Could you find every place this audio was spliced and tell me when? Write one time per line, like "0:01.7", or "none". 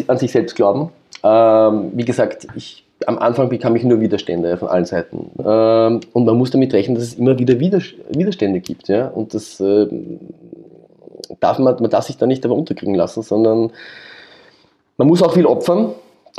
0:05.4